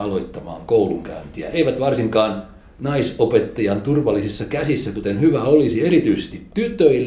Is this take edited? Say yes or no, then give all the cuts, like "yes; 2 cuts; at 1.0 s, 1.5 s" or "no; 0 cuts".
no; 0 cuts